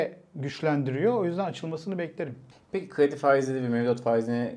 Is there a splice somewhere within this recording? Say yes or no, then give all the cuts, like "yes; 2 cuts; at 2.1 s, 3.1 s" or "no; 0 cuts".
yes; 1 cut; at 2.5 s